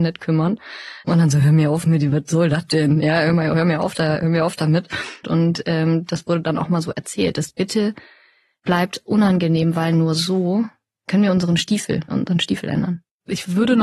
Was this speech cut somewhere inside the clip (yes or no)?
yes